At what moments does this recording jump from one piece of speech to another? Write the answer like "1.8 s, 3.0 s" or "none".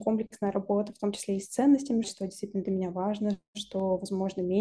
2.0 s